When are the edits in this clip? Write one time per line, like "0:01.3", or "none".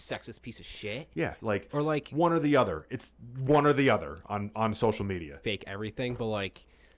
0:01.4
0:05.4

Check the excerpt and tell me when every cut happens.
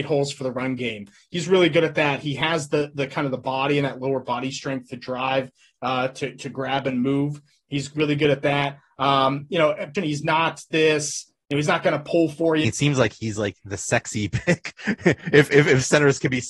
0:09.9
0:12.6

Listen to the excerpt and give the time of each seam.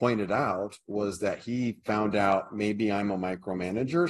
none

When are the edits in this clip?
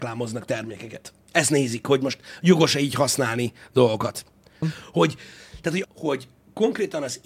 0:01.2
0:04.6
0:05.8

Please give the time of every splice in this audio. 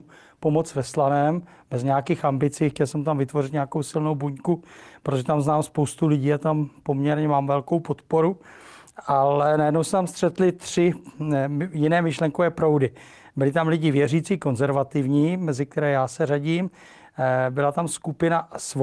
none

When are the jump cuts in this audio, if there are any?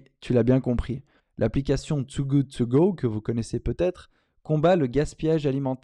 0:01.2

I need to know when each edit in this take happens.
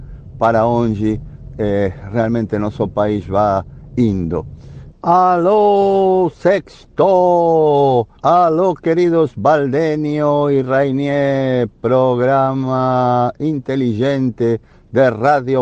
0:04.9
0:08.2

